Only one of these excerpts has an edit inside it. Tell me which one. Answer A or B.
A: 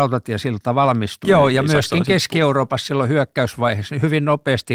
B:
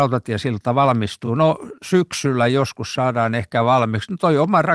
A